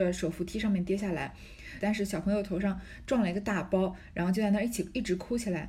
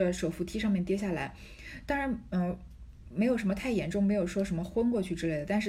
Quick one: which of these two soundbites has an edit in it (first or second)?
first